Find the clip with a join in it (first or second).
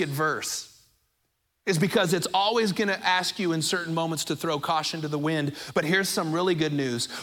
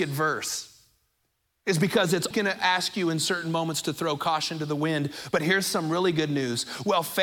second